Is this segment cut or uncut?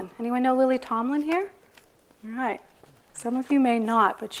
uncut